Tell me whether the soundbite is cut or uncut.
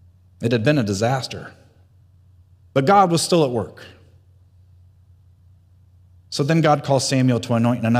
uncut